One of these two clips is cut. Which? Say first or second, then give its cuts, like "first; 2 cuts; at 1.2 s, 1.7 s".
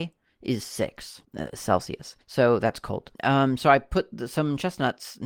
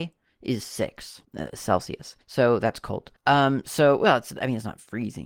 first; 1 cut; at 3.1 s